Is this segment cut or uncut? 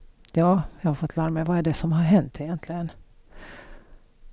uncut